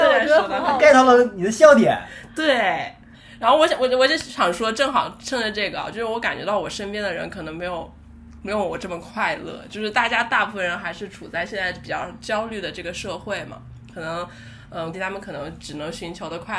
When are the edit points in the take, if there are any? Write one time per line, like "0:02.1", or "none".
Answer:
0:14.9